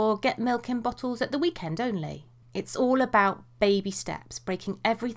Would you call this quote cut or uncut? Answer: cut